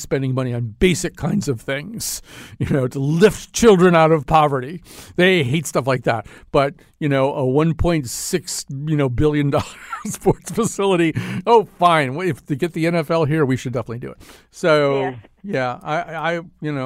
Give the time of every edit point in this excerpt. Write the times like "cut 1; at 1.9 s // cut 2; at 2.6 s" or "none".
none